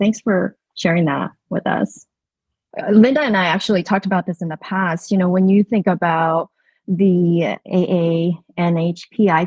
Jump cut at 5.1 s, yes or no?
no